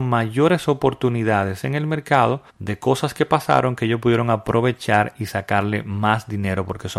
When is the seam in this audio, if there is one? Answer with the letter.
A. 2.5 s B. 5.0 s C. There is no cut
A